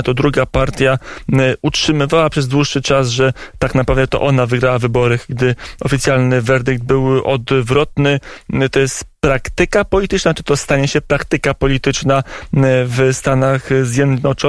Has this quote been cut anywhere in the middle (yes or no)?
no